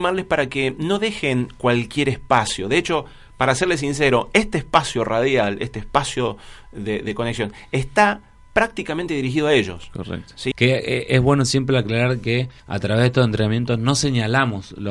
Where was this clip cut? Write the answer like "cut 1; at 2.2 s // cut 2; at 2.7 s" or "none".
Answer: cut 1; at 10.5 s // cut 2; at 12.6 s

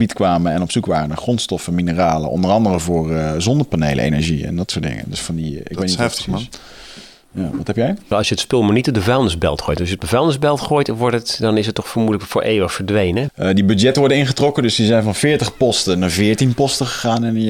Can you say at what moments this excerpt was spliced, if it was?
cut 1; at 8.1 s // cut 2; at 13.3 s

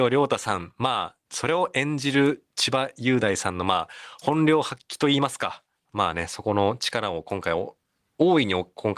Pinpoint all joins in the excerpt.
cut 1; at 1.3 s

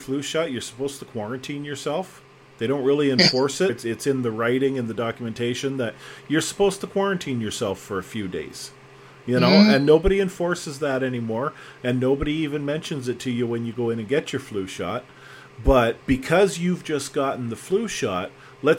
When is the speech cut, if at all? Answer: cut 1; at 3.7 s // cut 2; at 16.0 s

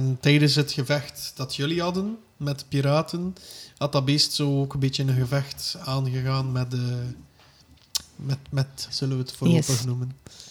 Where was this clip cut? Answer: cut 1; at 8.9 s

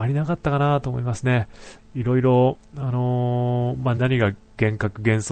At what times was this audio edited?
cut 1; at 1.8 s // cut 2; at 4.0 s

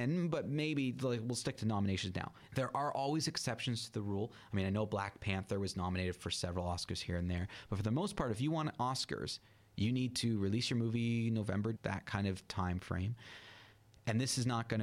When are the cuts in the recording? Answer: cut 1; at 2.5 s // cut 2; at 11.8 s

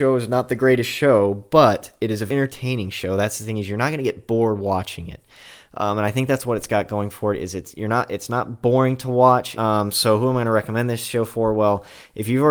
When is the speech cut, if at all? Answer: cut 1; at 2.3 s // cut 2; at 9.5 s

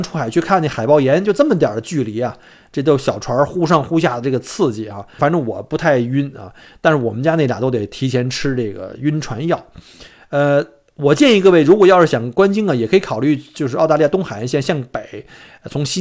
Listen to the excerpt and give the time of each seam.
cut 1; at 5.2 s

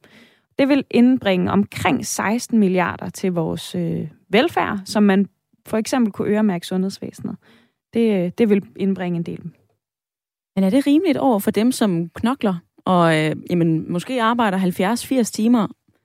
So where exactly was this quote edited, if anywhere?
none

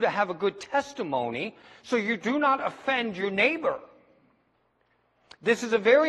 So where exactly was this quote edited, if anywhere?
none

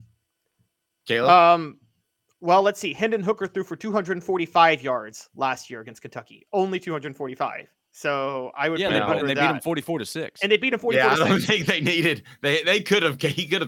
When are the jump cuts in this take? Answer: none

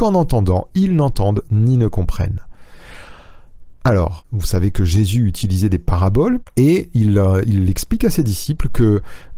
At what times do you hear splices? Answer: none

